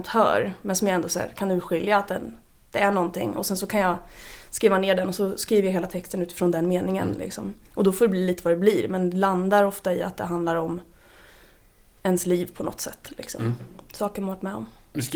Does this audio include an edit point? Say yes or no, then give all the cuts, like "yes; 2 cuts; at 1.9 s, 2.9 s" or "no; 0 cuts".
no; 0 cuts